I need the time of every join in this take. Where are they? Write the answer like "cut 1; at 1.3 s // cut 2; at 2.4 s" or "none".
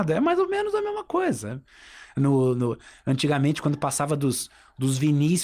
none